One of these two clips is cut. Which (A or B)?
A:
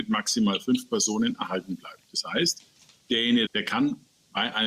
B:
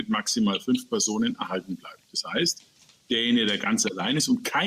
A